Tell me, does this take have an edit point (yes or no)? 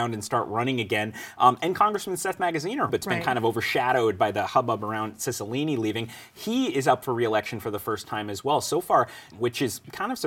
yes